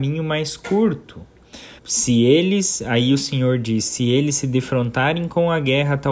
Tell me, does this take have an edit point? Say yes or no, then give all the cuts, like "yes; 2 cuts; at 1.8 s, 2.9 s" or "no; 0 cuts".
yes; 1 cut; at 1.8 s